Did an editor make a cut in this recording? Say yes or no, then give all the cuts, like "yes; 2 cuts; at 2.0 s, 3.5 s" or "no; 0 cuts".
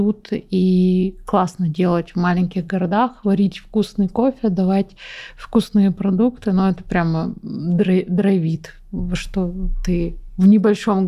no; 0 cuts